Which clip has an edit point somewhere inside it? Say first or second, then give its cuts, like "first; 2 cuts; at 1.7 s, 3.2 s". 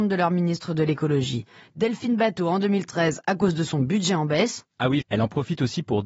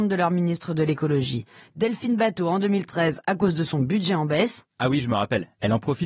first; 1 cut; at 5.0 s